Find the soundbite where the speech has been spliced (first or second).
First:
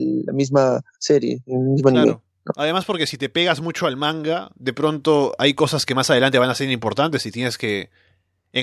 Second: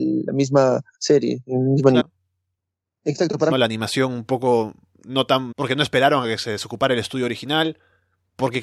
second